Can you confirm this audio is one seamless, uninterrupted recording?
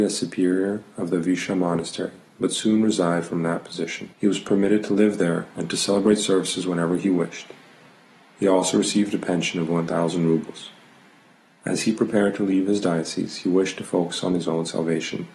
no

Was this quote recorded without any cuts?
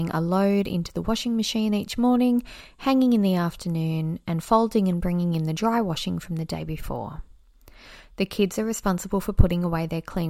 yes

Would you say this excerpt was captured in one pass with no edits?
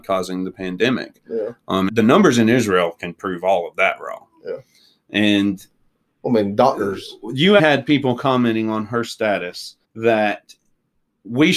no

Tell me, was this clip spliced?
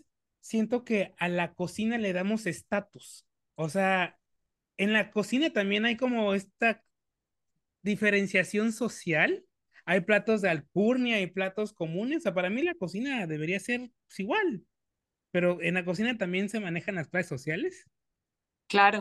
no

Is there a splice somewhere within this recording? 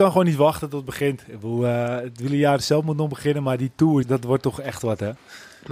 yes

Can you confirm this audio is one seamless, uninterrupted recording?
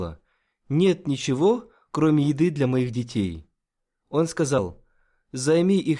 yes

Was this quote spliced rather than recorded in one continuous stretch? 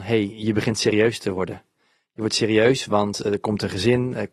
no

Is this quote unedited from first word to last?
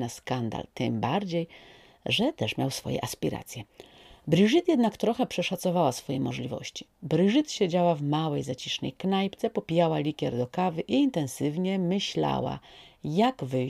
no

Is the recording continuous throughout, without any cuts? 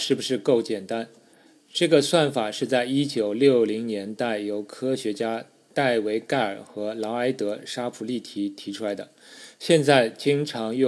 yes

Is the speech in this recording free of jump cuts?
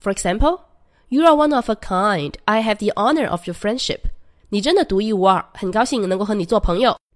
yes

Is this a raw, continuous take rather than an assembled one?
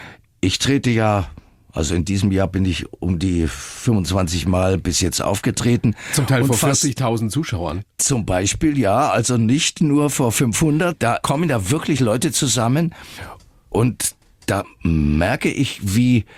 yes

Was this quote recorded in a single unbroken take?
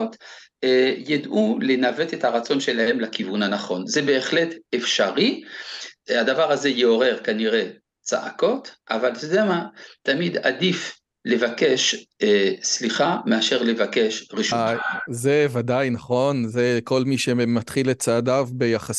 yes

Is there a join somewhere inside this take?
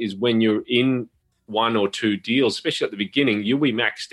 no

